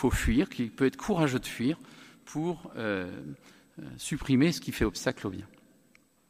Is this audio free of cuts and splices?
yes; 0 cuts

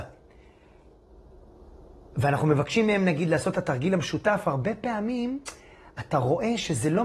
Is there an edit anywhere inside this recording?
no; 0 cuts

